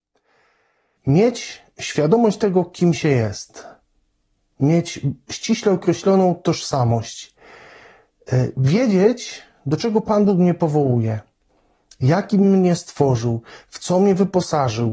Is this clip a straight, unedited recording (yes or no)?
no